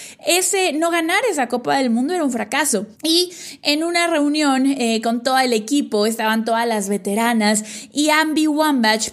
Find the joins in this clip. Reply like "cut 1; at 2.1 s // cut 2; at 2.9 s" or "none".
cut 1; at 2.9 s

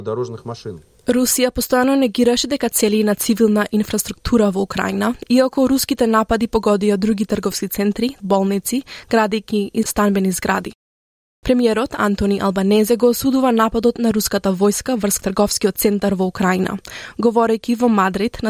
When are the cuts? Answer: cut 1; at 8.2 s

